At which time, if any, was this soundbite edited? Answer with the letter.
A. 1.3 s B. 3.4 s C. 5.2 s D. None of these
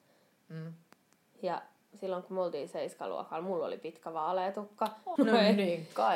C